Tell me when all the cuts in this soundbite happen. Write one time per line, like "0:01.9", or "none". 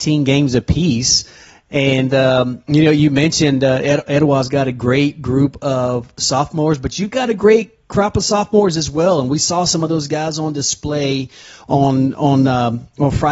none